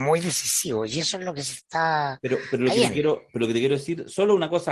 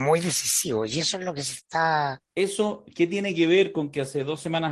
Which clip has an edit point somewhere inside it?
second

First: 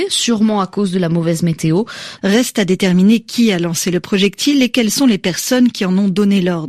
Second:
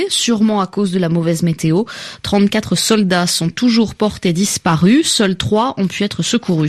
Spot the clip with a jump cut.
first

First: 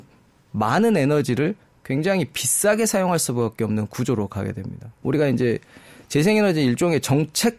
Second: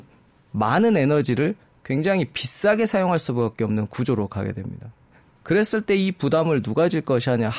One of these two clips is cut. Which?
first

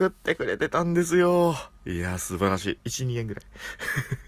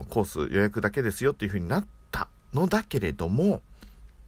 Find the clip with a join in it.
first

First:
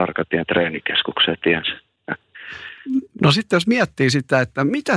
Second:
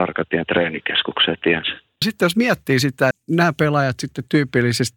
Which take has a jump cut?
second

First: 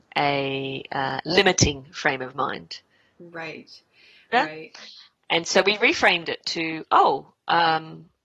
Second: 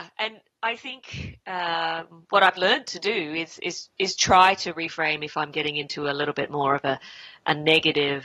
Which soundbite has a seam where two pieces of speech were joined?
first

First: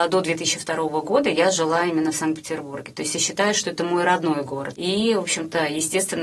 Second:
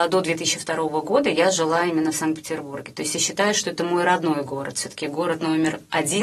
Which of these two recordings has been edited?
first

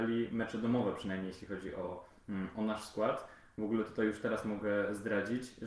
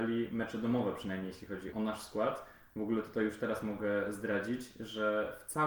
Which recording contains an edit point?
second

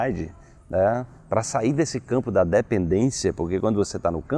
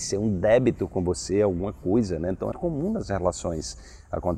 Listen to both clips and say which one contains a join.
second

